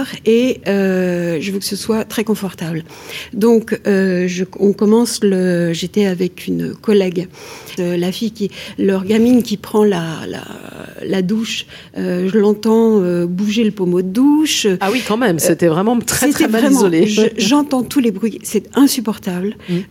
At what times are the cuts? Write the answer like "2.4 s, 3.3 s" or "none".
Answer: 7.8 s

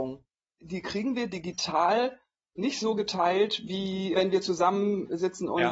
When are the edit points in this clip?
4.1 s

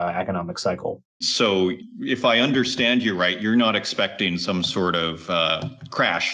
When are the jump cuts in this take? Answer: 1.2 s

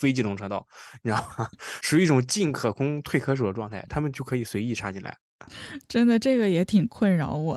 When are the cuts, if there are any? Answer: none

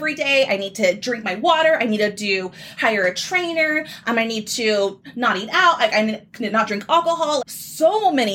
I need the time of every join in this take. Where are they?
7.4 s

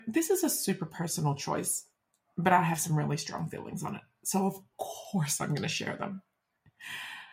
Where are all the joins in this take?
none

